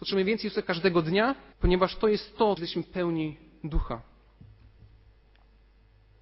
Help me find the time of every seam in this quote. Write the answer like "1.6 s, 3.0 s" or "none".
1.5 s, 2.6 s